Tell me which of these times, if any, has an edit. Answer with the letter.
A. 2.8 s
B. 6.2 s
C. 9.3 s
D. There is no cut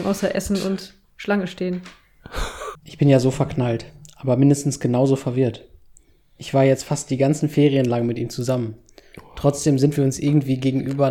A